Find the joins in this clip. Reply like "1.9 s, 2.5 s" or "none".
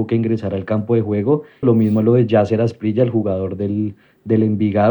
1.6 s

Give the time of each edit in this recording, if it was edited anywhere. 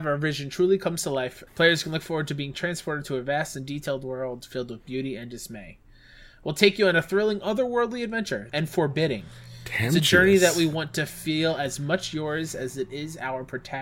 1.5 s, 8.5 s

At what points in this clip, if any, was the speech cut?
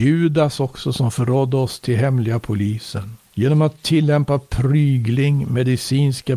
3.3 s

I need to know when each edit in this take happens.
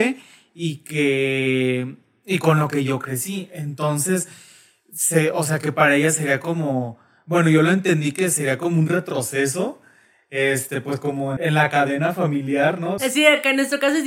11.4 s, 13.0 s

